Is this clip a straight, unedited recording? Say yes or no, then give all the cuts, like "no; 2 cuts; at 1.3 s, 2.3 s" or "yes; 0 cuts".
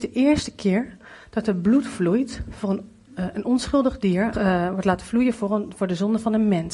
no; 1 cut; at 4.3 s